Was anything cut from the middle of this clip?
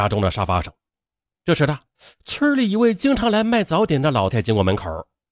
yes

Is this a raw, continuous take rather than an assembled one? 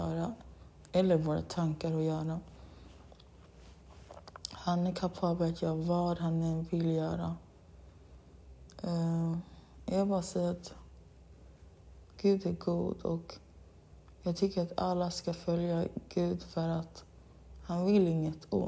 no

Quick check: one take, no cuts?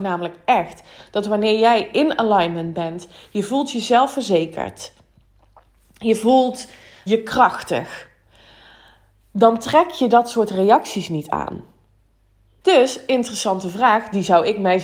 no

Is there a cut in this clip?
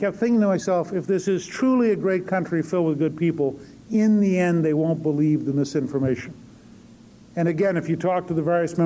no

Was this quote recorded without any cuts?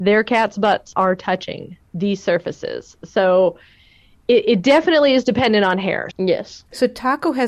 no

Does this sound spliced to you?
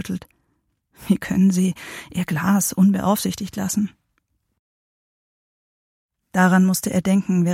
no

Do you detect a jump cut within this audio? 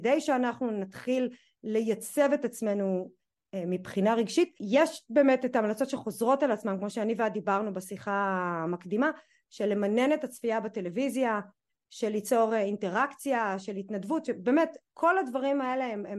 no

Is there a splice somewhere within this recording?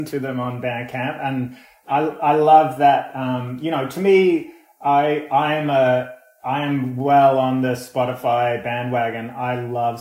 no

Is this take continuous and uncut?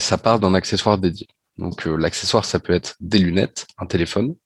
yes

